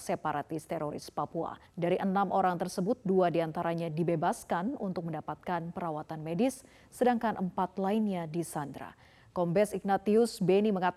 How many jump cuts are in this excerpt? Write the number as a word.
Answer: one